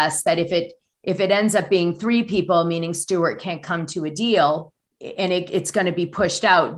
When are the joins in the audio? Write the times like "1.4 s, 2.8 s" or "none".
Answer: 4.9 s